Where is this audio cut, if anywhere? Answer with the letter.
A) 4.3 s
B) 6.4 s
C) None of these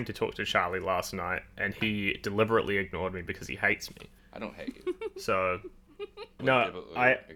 B